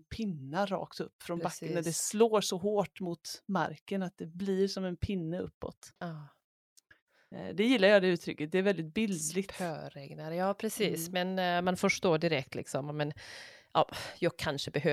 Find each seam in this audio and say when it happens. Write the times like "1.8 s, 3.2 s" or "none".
6.0 s